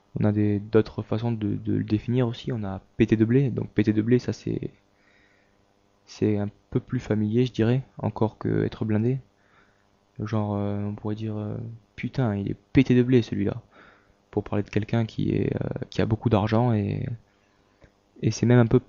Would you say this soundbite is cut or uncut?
uncut